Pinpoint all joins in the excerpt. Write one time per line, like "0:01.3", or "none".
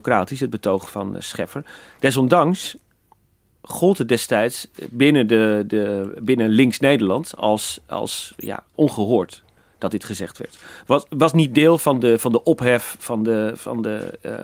none